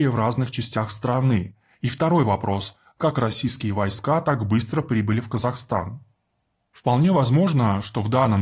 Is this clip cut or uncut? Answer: uncut